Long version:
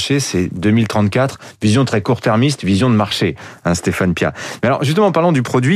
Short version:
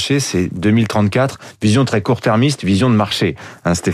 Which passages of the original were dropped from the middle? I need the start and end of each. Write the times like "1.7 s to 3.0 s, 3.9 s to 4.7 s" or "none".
none